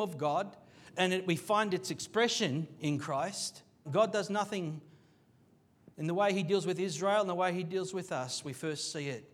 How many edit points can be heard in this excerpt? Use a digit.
1